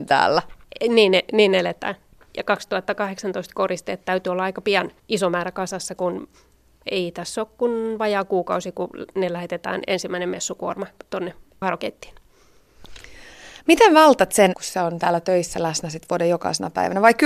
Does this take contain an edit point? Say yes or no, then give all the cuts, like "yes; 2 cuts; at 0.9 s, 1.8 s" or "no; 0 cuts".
yes; 2 cuts; at 5.0 s, 14.5 s